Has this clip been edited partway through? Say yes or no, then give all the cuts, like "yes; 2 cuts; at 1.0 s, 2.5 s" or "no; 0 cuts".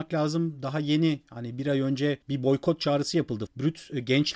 yes; 2 cuts; at 2.2 s, 3.5 s